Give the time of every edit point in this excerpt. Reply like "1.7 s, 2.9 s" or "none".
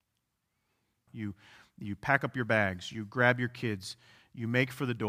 1.1 s